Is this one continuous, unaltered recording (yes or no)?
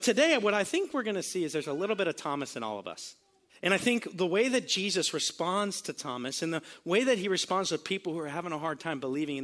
no